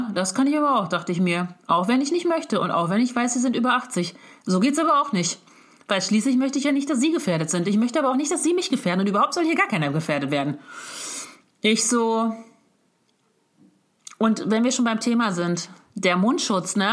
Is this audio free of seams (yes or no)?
yes